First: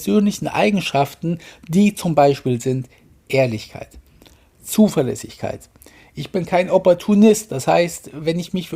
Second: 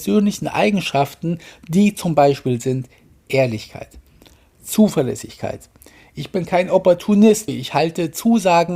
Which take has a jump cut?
second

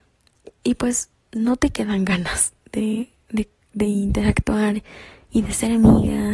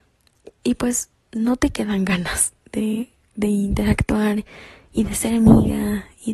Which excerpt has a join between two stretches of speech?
second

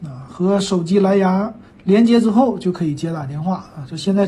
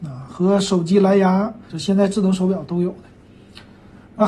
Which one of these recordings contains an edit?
second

